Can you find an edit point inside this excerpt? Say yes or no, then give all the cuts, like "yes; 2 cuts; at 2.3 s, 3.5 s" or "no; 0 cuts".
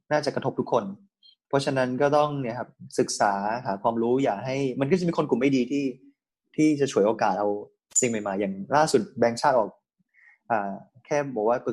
no; 0 cuts